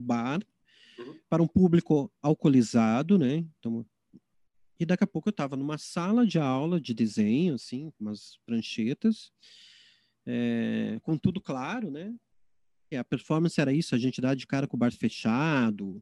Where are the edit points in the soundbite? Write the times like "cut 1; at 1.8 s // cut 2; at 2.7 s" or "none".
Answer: cut 1; at 12.9 s